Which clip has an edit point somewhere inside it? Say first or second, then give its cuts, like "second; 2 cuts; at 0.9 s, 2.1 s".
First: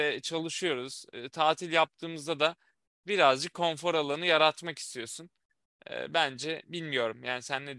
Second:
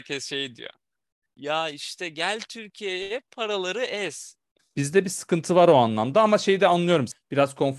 second; 1 cut; at 4.6 s